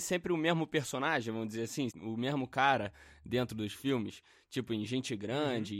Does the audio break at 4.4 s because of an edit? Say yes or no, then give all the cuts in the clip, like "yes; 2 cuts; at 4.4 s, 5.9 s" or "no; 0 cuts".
no; 1 cut; at 1.9 s